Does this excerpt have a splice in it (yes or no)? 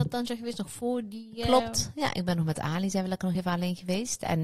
no